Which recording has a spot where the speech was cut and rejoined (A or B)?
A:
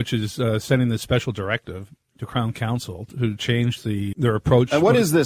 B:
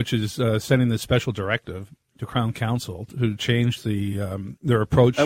A